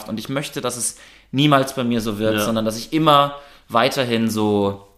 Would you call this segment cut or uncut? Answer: uncut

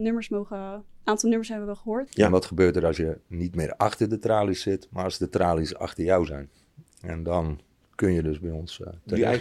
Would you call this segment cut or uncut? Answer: cut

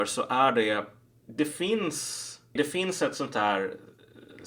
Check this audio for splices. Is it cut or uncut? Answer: cut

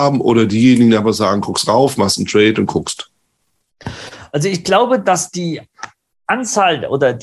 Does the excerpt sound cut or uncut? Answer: uncut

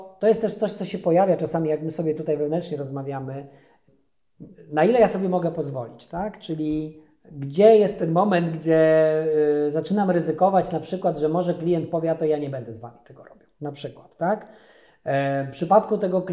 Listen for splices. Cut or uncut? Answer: uncut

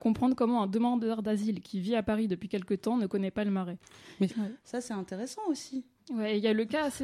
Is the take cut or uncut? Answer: cut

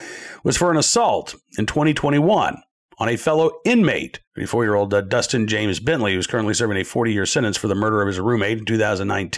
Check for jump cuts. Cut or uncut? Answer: cut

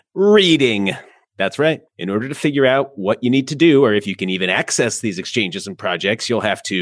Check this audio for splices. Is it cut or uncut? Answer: uncut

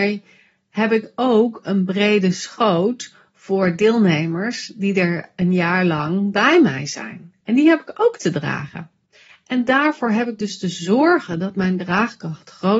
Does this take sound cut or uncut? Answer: uncut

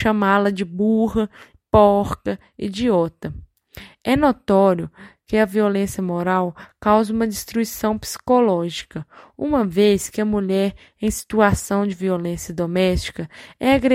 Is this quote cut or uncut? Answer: cut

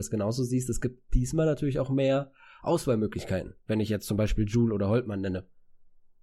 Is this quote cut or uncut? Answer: uncut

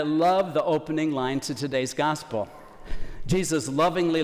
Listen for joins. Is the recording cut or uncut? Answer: uncut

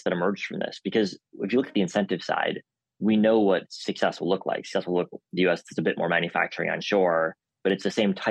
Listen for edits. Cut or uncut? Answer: cut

